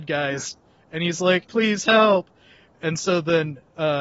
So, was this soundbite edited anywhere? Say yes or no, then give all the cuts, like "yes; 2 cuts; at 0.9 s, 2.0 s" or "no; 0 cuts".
yes; 1 cut; at 1.5 s